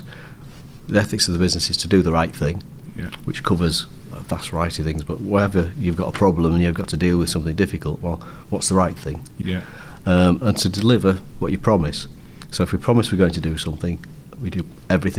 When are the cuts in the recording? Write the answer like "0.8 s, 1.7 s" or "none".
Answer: 9.4 s